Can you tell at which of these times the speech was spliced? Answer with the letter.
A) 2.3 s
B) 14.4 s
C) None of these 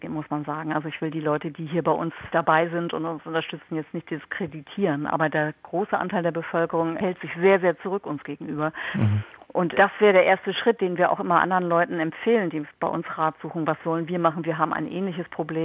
A